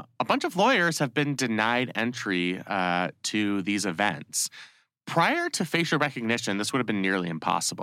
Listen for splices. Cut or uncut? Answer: uncut